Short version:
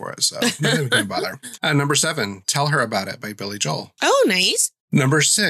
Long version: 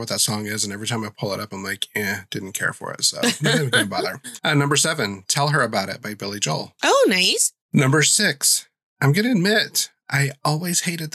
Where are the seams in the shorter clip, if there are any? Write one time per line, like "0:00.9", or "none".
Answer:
none